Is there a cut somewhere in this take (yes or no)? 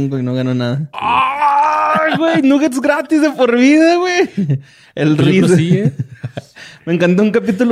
yes